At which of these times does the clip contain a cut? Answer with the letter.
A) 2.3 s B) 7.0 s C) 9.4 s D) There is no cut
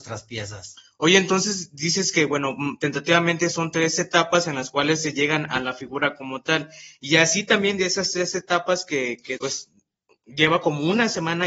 C